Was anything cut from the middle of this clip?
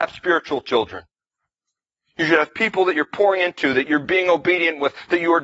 no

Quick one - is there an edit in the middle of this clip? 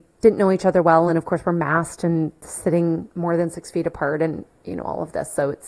no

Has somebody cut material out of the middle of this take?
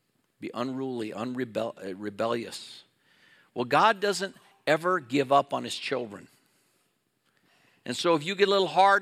no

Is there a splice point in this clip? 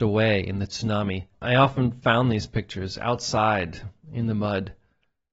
yes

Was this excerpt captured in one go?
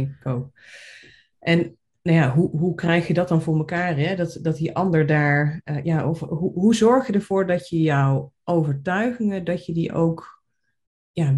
yes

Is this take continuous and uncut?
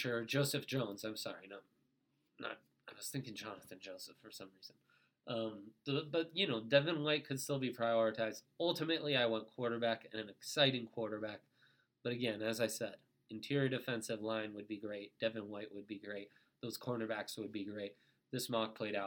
yes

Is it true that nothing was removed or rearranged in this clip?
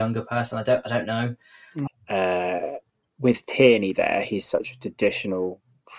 no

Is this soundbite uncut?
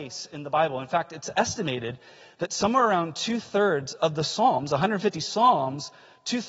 yes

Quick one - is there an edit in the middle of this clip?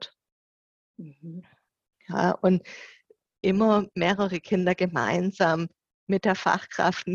no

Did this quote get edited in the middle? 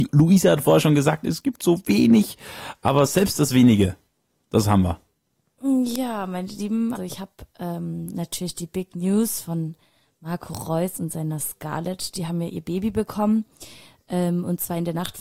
yes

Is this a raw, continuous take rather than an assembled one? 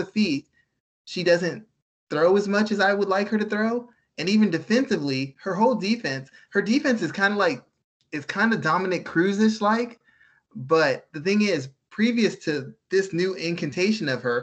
yes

